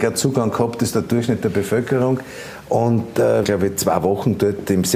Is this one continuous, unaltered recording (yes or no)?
no